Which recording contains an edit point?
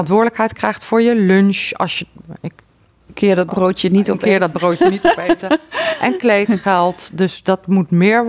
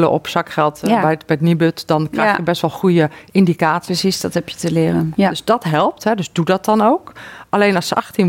second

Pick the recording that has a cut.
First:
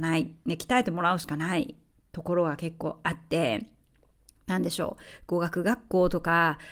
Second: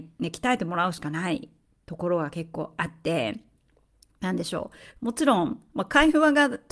second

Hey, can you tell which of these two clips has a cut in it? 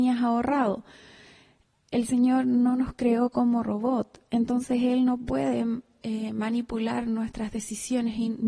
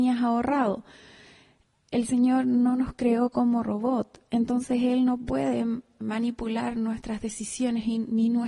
second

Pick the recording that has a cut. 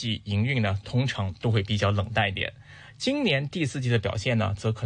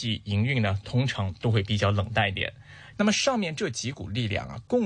second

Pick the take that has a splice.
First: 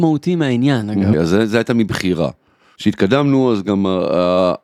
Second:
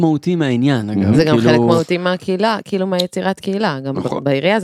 first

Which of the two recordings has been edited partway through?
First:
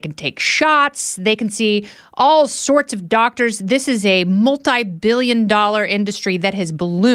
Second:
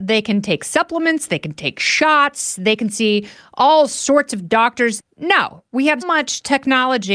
second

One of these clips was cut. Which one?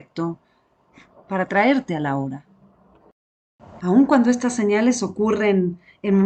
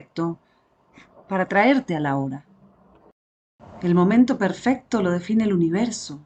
first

